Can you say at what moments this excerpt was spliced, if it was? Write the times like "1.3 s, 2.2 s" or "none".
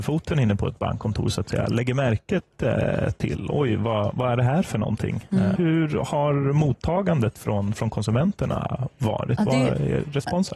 5.6 s